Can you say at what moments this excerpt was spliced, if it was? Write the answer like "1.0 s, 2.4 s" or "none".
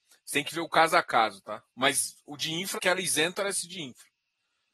1.7 s, 2.8 s